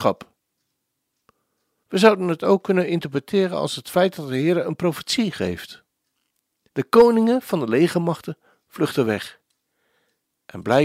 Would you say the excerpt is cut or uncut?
cut